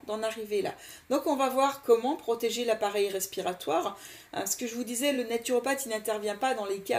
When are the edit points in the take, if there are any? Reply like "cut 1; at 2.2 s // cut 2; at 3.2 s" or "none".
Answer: none